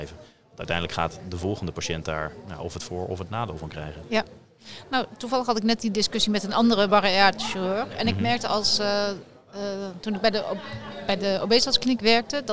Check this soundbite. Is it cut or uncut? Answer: uncut